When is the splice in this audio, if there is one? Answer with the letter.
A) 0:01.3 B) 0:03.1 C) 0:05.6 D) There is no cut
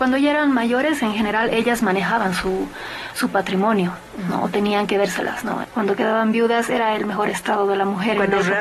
C